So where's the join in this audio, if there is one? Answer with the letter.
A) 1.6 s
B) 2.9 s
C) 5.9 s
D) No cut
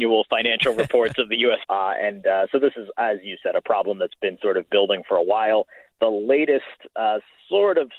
A